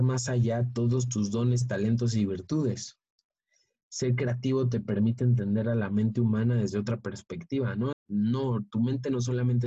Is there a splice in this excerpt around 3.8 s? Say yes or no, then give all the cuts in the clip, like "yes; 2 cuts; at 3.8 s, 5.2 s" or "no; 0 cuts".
no; 1 cut; at 7.9 s